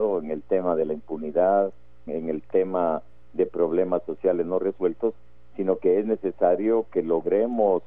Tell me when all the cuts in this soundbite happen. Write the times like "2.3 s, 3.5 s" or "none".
2.1 s